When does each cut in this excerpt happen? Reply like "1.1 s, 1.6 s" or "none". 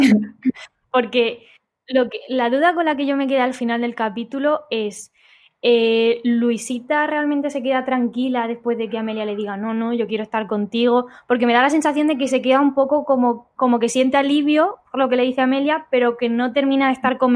none